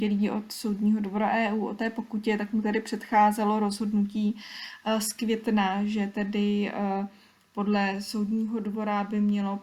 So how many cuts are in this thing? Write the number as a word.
zero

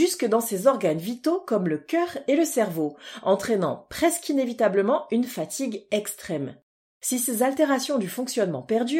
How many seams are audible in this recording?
zero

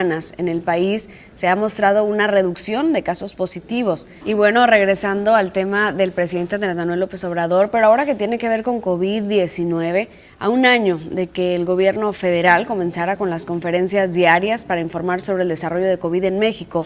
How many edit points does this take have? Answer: one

